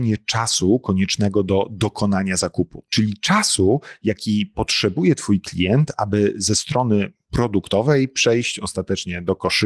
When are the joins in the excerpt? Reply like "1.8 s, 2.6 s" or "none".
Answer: none